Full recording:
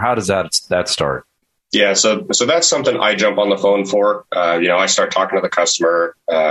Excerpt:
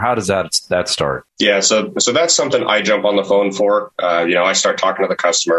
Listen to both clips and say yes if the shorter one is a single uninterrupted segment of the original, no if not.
no